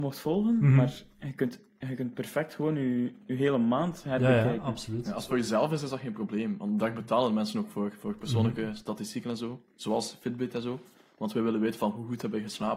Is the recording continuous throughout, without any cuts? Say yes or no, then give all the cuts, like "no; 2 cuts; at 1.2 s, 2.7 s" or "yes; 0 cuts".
yes; 0 cuts